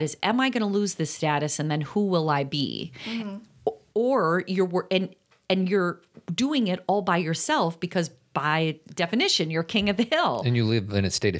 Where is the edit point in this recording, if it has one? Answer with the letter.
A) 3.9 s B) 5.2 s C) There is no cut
C